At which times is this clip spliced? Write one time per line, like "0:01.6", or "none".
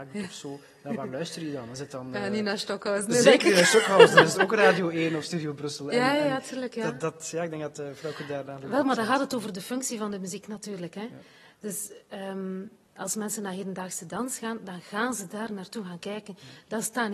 none